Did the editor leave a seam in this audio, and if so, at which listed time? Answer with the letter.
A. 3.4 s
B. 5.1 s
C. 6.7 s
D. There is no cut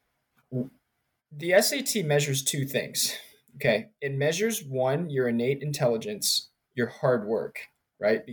C